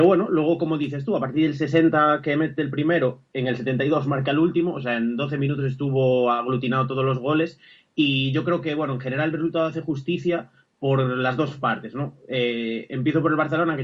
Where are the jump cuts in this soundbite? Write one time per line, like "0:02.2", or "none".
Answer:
none